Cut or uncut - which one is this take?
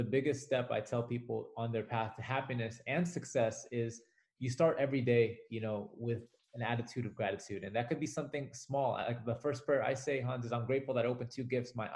uncut